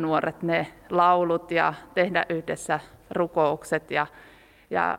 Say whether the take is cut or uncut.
uncut